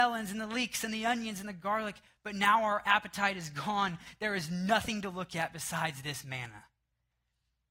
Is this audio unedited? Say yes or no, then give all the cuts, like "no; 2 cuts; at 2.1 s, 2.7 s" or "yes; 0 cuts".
yes; 0 cuts